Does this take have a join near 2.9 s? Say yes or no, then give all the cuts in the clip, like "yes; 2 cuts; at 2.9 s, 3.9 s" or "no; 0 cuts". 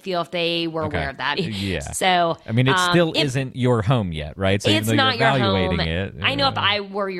no; 1 cut; at 1.4 s